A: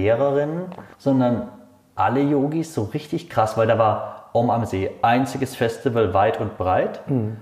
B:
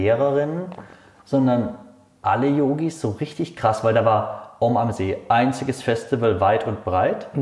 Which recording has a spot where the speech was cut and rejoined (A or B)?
A